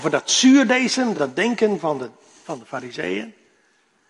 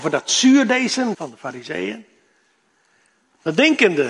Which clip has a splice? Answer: second; 1 cut; at 1.1 s

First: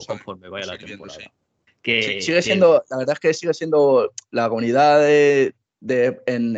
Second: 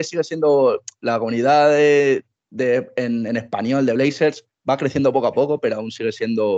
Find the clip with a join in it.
first; 1 cut; at 1.7 s

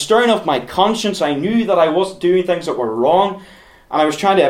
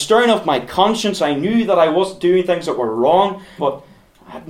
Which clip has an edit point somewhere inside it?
second; 1 cut; at 3.6 s

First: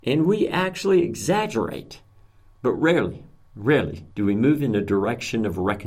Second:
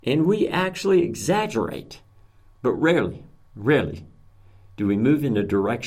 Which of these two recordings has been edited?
first; 1 cut; at 4.1 s

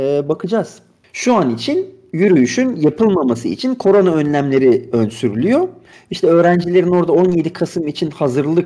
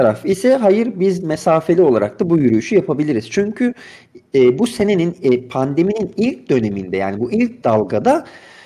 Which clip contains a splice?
first; 1 cut; at 5.9 s

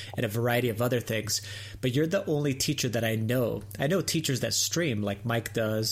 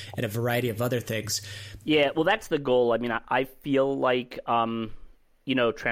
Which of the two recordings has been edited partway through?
second; 1 cut; at 1.8 s

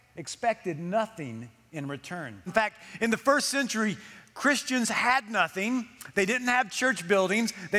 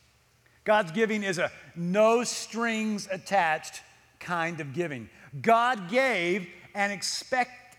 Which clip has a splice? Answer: first; 1 cut; at 2.5 s

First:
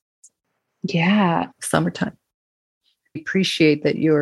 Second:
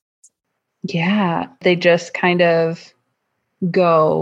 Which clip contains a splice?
first; 2 cuts; at 1.5 s, 3.2 s

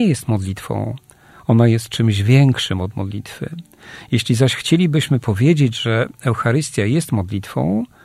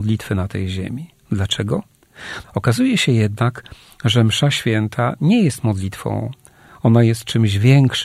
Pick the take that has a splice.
second; 1 cut; at 2.4 s

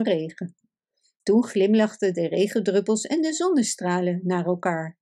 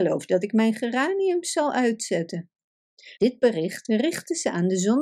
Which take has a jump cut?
second; 1 cut; at 3.2 s

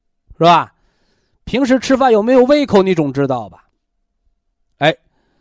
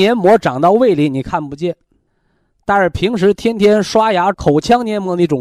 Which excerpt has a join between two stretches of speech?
second; 1 cut; at 4.3 s

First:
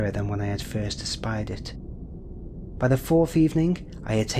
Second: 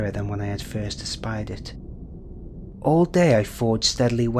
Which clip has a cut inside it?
second; 1 cut; at 2.7 s

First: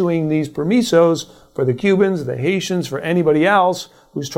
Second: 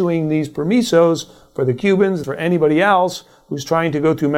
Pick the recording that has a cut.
second; 1 cut; at 2.2 s

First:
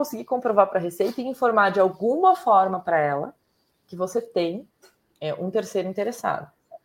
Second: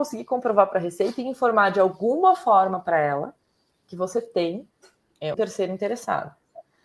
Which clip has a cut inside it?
second; 1 cut; at 5.3 s

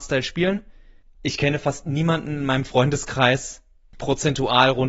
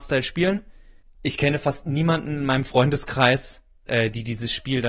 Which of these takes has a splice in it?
second; 1 cut; at 3.9 s

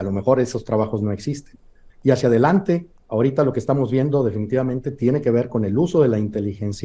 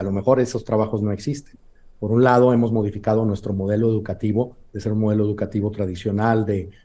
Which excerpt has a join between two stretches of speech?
first; 1 cut; at 1.9 s

